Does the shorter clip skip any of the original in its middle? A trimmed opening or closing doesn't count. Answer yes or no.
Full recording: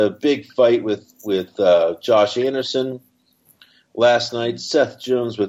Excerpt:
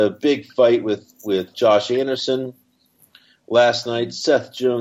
yes